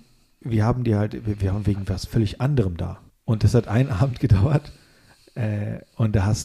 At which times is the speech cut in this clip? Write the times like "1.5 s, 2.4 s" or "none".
3.1 s